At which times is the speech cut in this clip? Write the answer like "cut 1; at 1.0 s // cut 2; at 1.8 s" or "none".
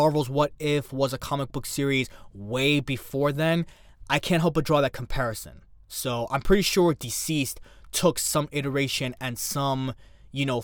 none